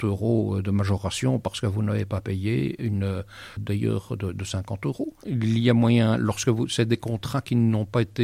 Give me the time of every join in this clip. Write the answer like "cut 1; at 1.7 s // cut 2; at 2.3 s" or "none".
cut 1; at 3.6 s // cut 2; at 5.2 s